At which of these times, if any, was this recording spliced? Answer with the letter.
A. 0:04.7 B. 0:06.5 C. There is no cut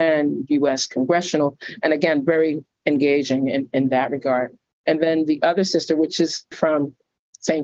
B